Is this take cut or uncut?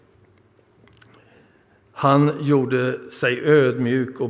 uncut